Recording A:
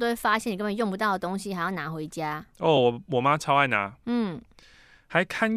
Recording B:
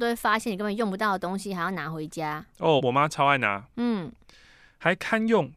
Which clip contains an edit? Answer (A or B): B